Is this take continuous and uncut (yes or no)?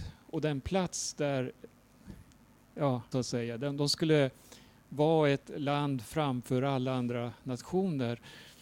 no